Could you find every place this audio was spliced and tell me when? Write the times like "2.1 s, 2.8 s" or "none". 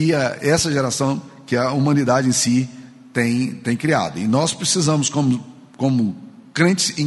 none